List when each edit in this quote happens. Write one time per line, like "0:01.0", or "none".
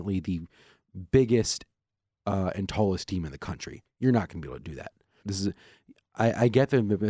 0:05.2